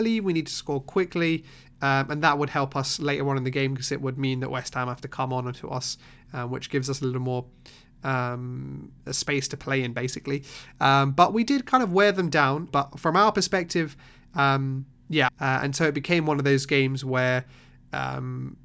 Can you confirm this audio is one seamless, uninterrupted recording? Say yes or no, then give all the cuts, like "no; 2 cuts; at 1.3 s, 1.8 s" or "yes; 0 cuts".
no; 3 cuts; at 9.0 s, 12.7 s, 15.3 s